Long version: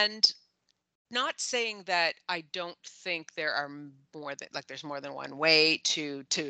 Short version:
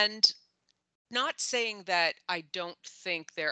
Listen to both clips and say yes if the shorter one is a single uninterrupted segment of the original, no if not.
yes